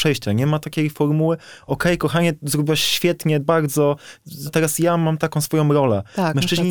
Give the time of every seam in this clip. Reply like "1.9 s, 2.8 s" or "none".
3.4 s, 4.5 s